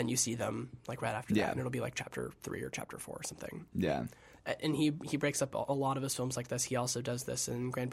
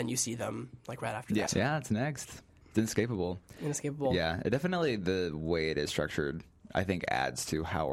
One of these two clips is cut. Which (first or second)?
second